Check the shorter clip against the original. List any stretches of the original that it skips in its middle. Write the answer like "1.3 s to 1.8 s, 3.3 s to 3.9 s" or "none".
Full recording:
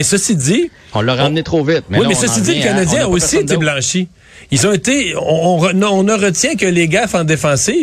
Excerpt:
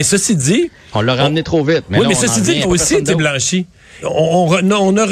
2.6 s to 3.0 s, 4.4 s to 5.1 s